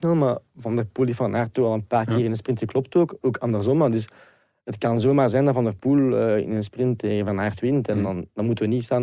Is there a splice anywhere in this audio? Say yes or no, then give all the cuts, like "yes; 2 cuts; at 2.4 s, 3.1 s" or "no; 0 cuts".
no; 0 cuts